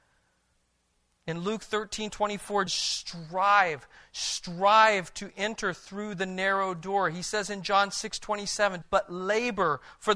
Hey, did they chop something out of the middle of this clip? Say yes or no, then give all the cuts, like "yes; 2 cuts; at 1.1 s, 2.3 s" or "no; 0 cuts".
yes; 2 cuts; at 2.7 s, 8.8 s